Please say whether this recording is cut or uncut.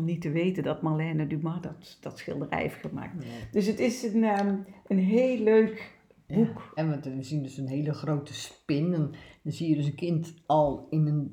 cut